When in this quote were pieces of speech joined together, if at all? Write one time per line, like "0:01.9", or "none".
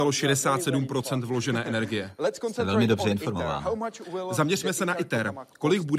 none